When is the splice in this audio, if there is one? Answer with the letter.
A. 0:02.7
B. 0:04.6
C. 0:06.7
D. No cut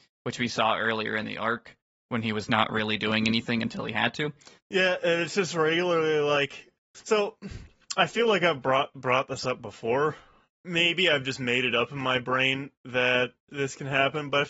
B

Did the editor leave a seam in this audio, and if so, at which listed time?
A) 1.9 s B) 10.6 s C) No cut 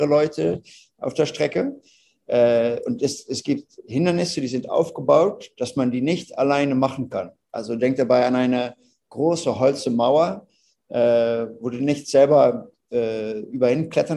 C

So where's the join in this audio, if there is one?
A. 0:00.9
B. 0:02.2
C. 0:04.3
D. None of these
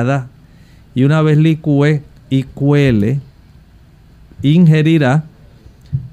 D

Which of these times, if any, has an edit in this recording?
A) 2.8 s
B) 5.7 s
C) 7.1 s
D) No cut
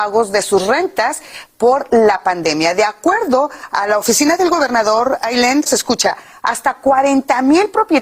B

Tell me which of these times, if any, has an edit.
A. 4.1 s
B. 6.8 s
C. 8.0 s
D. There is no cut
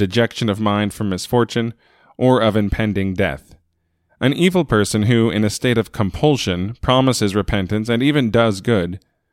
A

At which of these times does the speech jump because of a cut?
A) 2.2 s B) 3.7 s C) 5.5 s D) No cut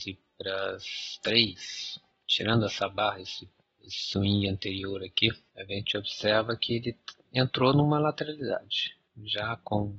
C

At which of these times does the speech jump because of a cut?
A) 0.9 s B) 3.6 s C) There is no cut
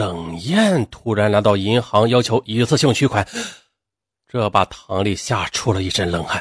C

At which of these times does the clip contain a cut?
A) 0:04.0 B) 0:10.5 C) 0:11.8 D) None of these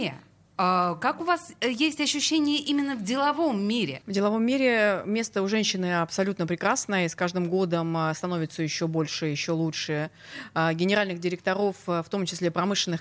A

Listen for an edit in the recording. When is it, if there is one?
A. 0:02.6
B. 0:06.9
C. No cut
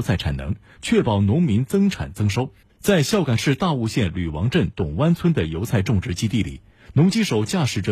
A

